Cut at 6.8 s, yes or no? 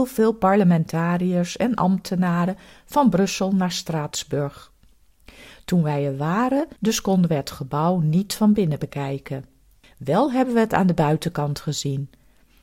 yes